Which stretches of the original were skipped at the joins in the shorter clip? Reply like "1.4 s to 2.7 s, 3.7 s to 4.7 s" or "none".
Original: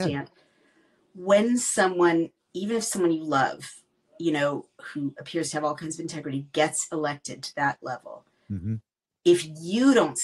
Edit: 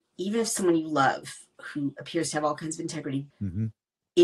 3.9 s to 4.7 s, 6.5 s to 8.4 s